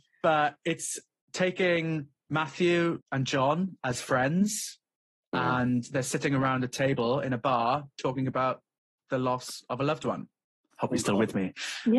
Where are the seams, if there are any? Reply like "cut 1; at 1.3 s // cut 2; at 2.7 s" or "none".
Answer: cut 1; at 3.0 s // cut 2; at 10.7 s